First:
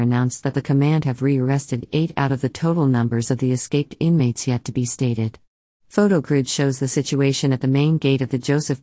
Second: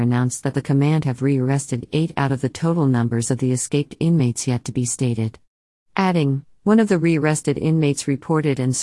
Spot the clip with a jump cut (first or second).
first